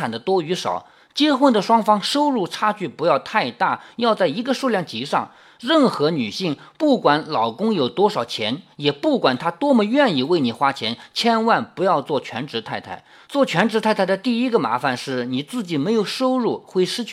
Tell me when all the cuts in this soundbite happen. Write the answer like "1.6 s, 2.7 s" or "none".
none